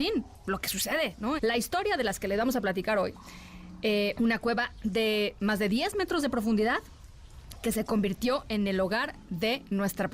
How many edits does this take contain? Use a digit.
2